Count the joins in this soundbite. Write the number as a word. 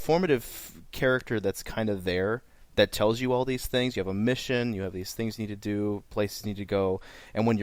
zero